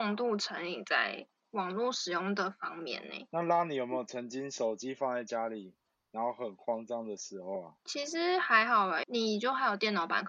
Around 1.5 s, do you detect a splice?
no; 1 cut; at 9.0 s

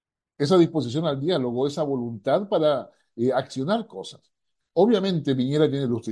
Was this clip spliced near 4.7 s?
no; 0 cuts

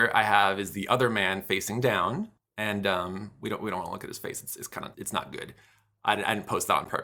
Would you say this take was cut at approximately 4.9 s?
yes; 1 cut; at 4.9 s

